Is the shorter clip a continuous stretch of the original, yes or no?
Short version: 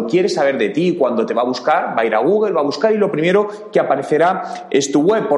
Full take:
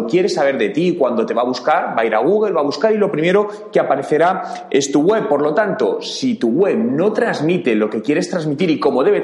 yes